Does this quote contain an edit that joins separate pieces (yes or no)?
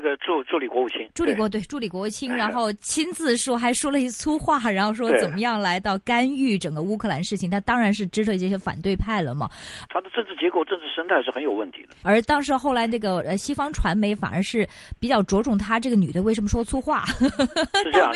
yes